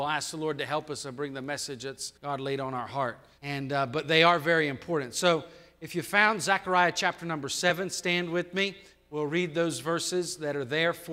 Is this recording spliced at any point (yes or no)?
yes